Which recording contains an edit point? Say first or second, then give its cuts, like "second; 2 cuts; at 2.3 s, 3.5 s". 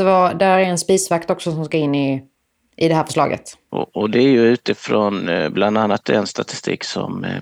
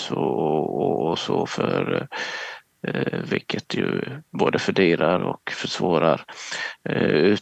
first; 1 cut; at 3.7 s